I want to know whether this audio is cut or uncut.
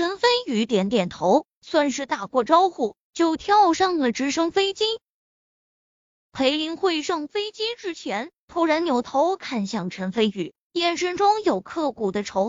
uncut